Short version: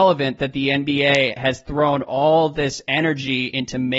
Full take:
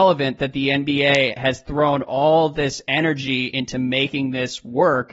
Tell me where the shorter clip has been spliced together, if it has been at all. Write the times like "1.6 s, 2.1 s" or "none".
none